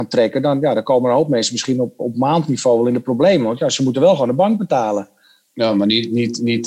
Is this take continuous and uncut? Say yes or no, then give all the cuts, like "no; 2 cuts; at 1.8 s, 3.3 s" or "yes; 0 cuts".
yes; 0 cuts